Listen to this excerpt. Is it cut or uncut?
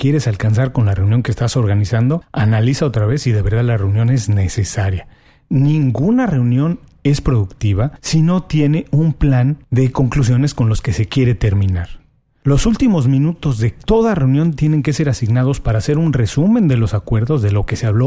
uncut